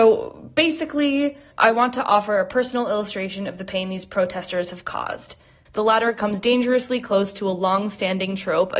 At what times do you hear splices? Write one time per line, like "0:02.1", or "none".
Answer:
0:01.5
0:05.7